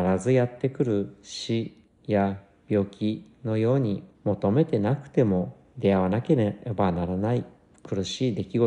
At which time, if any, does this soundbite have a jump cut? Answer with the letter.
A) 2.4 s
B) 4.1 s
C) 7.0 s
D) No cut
B